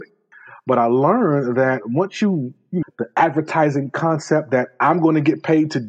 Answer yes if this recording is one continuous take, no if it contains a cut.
no